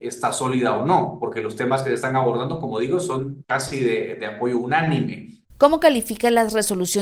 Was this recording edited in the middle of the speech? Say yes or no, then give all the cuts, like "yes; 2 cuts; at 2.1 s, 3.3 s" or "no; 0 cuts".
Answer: yes; 1 cut; at 5.5 s